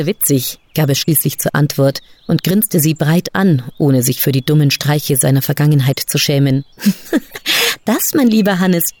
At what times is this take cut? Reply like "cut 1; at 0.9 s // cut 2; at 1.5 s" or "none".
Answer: cut 1; at 6.7 s